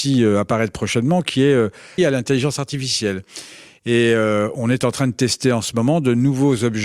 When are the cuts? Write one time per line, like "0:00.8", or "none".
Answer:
0:02.0